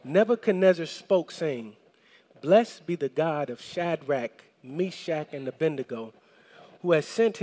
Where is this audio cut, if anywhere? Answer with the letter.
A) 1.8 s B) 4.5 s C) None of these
C